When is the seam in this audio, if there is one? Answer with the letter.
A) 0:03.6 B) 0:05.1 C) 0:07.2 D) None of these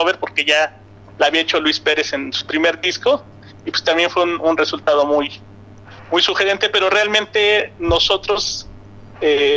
D